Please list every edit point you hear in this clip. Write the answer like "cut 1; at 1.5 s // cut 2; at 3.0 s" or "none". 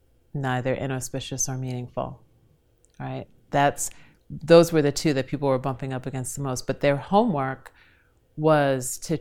none